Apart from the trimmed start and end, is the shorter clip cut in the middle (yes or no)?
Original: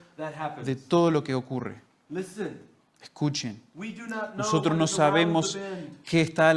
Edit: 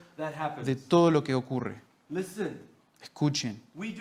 no